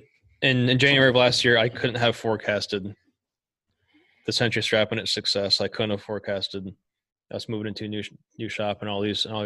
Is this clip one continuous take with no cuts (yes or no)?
yes